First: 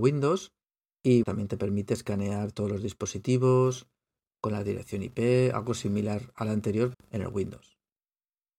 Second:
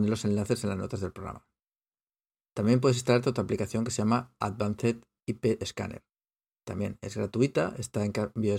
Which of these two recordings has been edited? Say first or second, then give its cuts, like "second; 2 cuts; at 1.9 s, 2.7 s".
first; 2 cuts; at 1.2 s, 6.9 s